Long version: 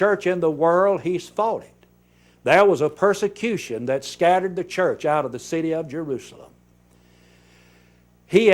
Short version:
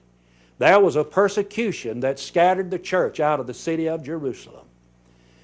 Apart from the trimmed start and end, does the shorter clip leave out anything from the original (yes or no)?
no